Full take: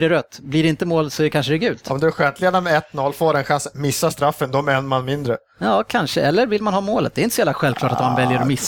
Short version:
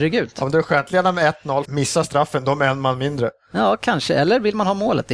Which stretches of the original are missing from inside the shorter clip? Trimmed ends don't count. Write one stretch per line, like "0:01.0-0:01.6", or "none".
0:03.1-0:03.7